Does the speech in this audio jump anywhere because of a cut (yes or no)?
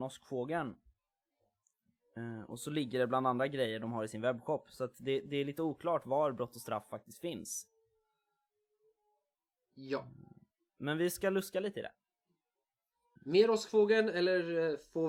yes